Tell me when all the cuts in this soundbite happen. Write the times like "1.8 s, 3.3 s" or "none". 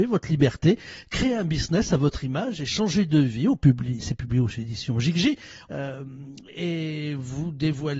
5.7 s